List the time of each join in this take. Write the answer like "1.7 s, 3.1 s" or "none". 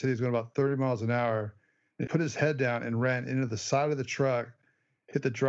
2.1 s

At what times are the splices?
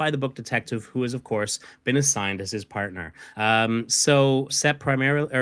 3.3 s, 4.5 s

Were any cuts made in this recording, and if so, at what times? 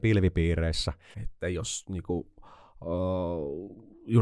1.1 s

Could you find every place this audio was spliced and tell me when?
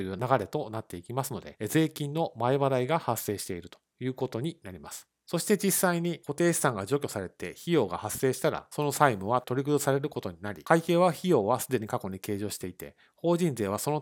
none

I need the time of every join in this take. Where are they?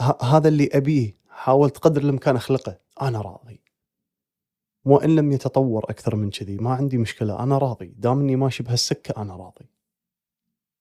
2.9 s

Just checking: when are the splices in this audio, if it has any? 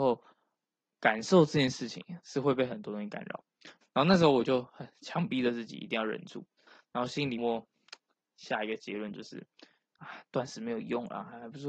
3.8 s, 7.4 s

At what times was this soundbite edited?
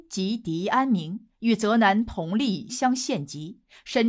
2.7 s

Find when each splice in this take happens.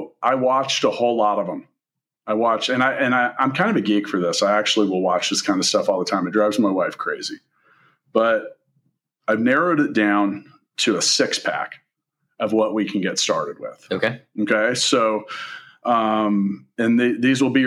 none

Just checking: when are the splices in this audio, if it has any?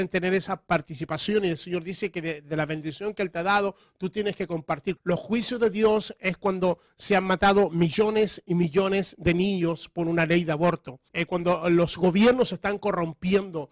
5.0 s, 11.1 s

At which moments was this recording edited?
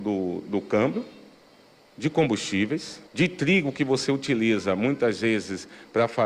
3.1 s

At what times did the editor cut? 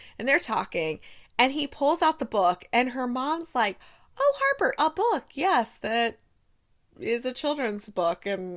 4.8 s

